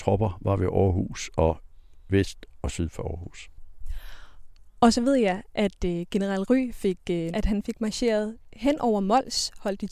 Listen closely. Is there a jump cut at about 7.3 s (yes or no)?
yes